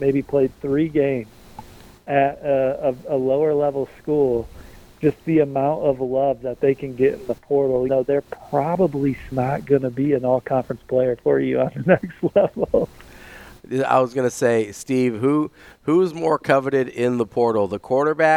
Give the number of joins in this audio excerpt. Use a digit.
2